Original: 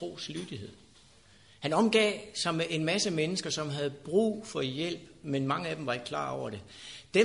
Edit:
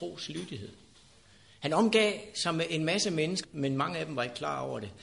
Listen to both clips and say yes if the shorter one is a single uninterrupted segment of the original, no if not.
no